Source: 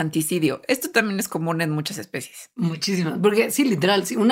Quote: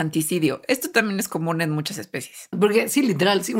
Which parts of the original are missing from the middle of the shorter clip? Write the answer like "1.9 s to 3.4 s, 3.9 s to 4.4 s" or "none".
2.5 s to 3.1 s